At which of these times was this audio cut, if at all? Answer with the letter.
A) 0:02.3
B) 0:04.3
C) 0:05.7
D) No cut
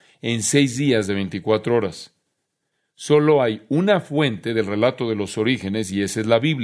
D